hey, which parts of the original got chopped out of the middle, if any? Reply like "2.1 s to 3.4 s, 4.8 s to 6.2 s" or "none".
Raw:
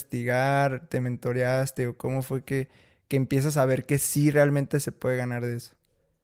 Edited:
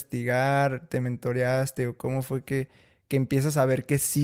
none